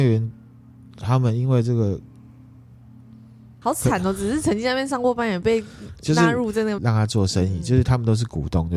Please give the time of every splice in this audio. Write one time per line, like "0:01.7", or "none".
0:03.6
0:06.8